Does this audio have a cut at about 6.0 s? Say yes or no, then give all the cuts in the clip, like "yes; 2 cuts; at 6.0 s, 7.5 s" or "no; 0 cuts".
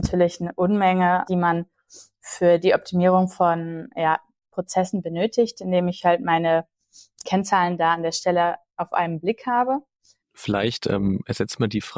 no; 3 cuts; at 1.2 s, 7.2 s, 10.2 s